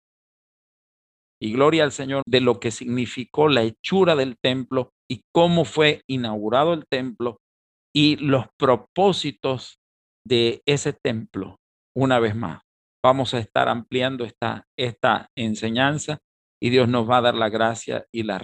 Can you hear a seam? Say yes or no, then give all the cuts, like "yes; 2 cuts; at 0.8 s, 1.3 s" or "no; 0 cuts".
yes; 2 cuts; at 2.2 s, 5.0 s